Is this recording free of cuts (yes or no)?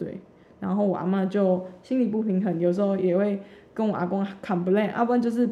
yes